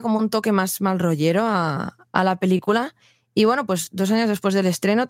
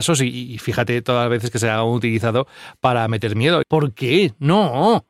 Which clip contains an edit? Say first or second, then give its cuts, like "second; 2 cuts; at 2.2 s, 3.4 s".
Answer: second; 1 cut; at 3.6 s